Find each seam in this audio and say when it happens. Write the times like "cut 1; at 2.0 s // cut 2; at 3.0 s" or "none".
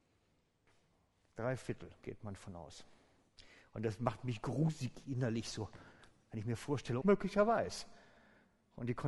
cut 1; at 7.0 s

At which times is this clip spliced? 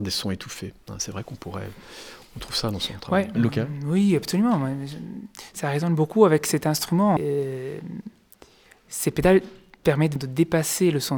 cut 1; at 7.2 s // cut 2; at 10.2 s

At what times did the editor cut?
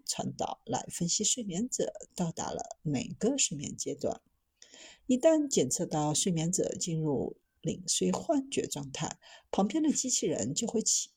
none

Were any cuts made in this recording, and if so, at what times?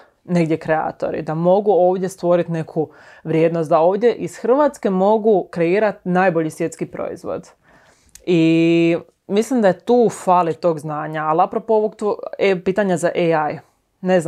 none

